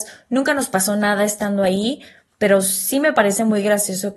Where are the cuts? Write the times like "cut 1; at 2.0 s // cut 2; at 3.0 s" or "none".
none

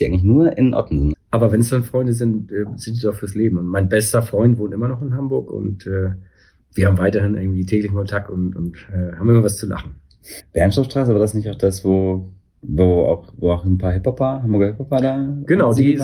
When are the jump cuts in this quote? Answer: cut 1; at 1.1 s // cut 2; at 10.4 s

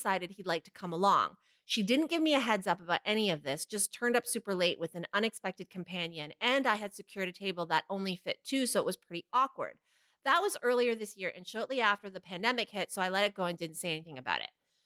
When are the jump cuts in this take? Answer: none

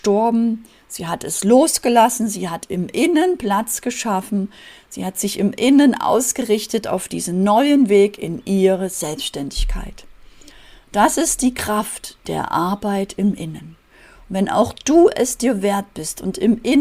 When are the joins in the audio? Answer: none

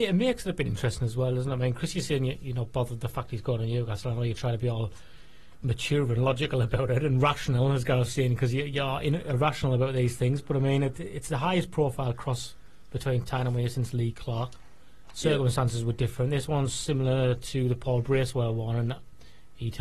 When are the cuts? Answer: none

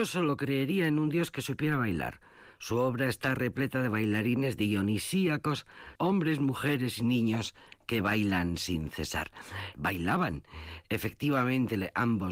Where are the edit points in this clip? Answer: cut 1; at 6.0 s // cut 2; at 9.7 s

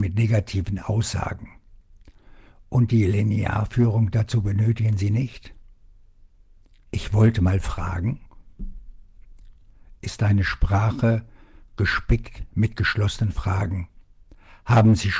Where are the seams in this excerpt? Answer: cut 1; at 6.8 s

